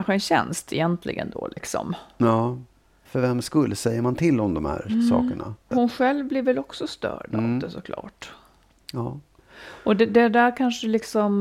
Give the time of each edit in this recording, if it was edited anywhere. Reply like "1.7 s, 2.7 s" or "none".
3.1 s, 5.7 s